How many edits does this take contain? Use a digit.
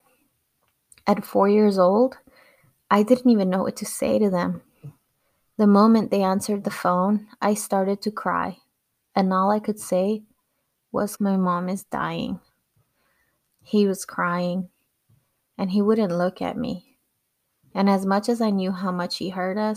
2